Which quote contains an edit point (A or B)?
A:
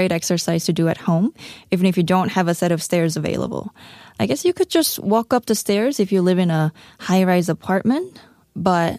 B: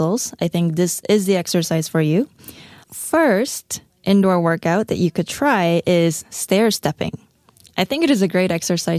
B